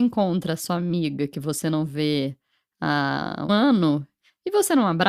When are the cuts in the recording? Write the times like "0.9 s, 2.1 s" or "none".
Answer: 3.5 s